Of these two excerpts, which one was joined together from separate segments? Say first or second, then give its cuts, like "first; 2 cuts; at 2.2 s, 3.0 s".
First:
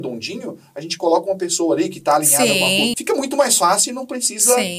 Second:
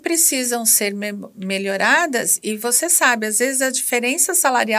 first; 1 cut; at 2.9 s